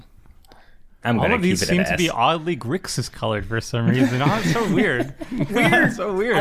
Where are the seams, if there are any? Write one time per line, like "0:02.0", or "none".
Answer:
none